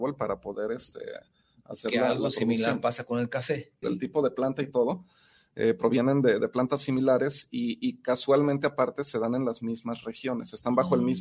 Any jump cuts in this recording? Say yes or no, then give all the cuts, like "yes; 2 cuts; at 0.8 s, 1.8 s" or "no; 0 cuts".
yes; 1 cut; at 3.8 s